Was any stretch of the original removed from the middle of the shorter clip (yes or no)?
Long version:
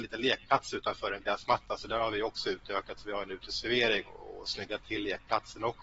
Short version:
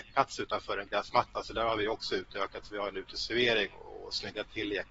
no